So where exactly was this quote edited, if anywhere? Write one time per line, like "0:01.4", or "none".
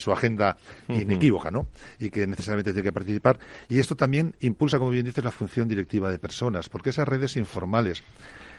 none